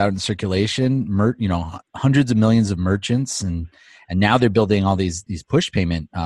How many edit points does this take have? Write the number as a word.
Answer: zero